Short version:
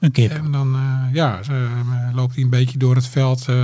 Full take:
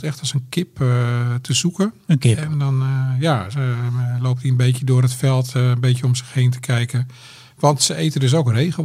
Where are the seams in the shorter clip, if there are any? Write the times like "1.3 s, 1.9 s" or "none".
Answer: none